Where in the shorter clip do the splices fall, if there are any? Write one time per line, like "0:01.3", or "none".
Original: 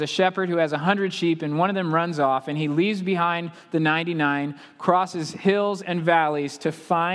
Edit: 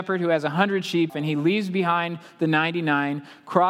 0:01.1